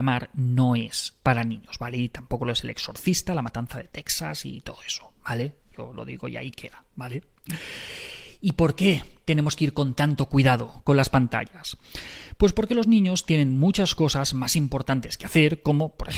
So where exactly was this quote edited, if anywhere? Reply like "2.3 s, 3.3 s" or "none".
none

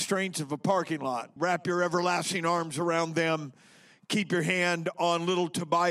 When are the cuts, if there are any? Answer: 1.4 s

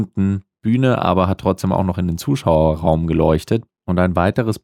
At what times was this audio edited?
3.7 s

